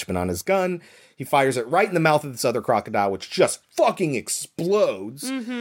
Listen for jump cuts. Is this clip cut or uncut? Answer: uncut